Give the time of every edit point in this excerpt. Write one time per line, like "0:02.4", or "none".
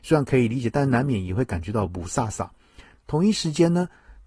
0:02.9

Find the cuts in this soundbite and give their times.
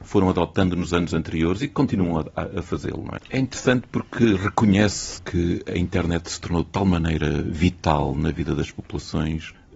0:03.2
0:05.2

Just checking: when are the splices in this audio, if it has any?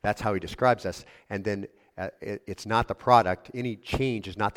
none

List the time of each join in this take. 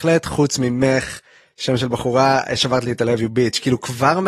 none

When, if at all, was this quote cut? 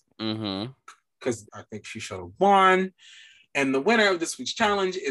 0:01.5

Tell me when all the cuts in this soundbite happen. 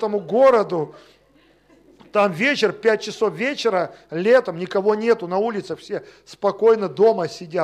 none

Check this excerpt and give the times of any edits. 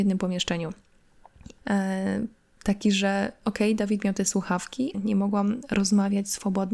0:01.6
0:04.9

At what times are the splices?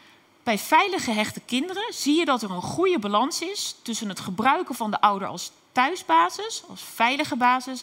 none

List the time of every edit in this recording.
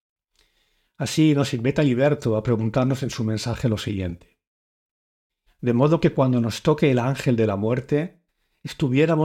0:05.5

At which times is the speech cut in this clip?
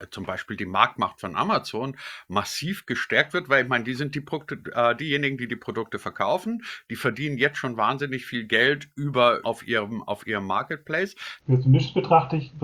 0:09.4
0:11.4

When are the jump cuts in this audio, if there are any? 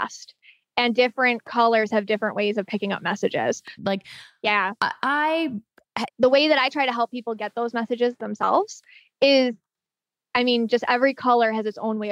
0:03.8
0:06.1

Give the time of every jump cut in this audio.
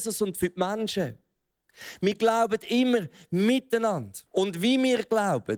0:04.3

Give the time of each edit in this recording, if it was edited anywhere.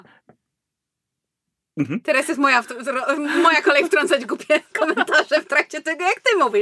none

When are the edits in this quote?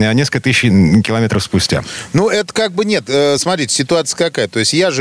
none

